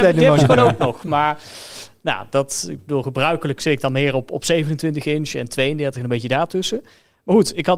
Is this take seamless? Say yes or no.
yes